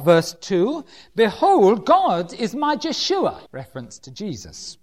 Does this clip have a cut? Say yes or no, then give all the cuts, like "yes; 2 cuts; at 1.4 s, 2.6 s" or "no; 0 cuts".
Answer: yes; 1 cut; at 3.5 s